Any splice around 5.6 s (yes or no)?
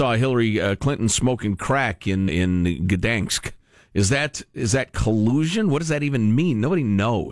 no